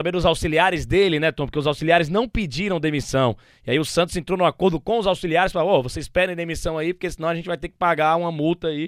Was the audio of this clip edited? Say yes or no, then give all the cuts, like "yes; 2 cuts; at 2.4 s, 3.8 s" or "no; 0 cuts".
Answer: no; 0 cuts